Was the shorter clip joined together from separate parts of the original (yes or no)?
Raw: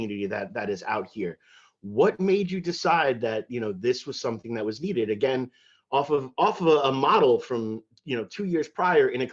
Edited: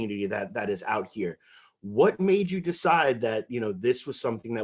no